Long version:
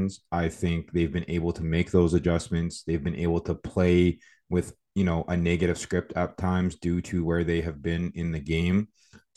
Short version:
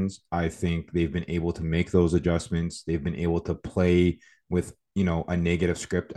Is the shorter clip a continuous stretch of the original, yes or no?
yes